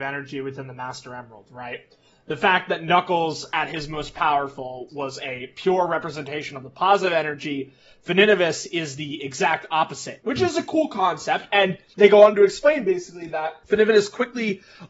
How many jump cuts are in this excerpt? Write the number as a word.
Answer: two